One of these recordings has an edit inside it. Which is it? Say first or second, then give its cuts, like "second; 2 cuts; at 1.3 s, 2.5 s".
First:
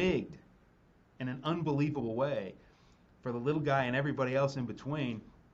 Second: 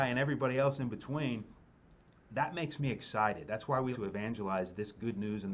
second; 1 cut; at 3.9 s